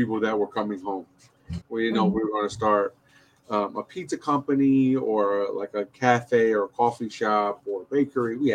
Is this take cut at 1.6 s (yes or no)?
yes